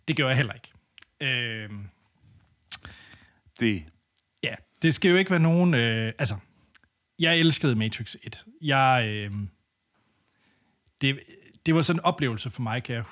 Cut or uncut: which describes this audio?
uncut